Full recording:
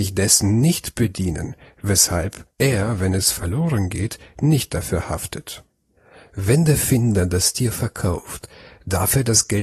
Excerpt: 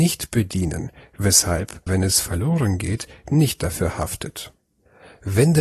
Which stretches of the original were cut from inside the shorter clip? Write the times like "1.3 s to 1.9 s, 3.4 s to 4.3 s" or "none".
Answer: 2.5 s to 3.0 s